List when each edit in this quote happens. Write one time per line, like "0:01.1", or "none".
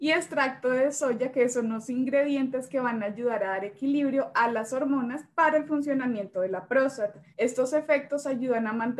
0:07.3